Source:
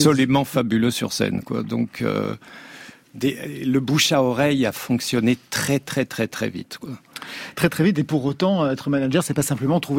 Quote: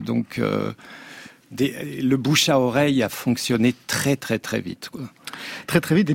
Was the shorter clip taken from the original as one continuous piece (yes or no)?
no